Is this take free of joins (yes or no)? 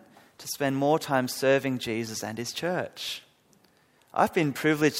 no